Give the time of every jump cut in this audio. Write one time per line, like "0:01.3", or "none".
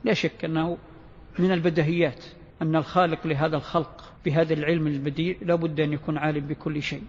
0:02.5
0:04.2